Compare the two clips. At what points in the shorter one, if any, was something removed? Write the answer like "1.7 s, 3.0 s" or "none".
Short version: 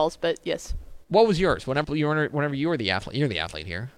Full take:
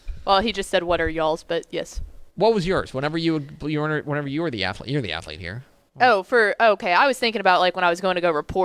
1.8 s